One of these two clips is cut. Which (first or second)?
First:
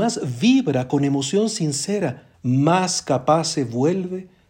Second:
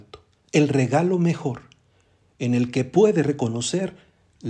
first